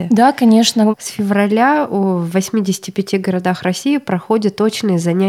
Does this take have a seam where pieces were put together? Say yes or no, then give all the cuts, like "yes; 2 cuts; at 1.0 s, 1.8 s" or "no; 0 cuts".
yes; 1 cut; at 0.9 s